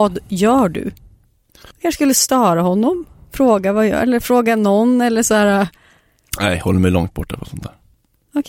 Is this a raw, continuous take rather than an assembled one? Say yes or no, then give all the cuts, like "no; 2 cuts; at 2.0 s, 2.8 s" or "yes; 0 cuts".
no; 1 cut; at 1.7 s